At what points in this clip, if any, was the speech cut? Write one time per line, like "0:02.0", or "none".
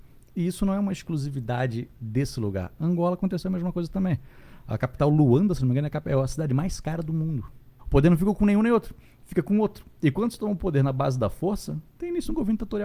0:07.8